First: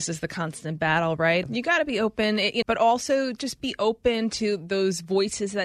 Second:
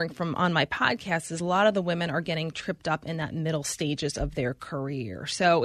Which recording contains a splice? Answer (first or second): first